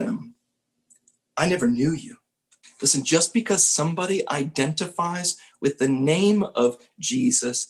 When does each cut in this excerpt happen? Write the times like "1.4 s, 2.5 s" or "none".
2.6 s